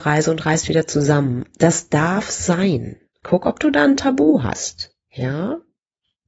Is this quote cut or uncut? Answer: cut